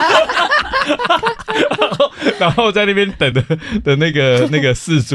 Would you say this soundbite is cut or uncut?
uncut